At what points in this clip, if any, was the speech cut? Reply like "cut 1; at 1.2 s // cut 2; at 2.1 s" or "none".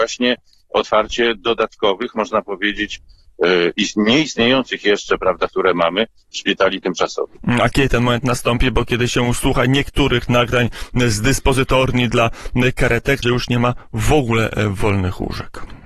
cut 1; at 5.5 s // cut 2; at 13.2 s